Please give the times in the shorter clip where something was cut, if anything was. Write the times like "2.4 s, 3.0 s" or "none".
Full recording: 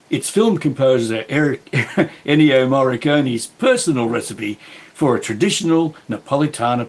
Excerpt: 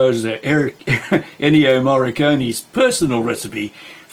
none